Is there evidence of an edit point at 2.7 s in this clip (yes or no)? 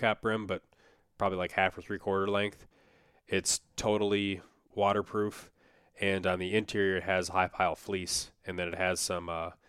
no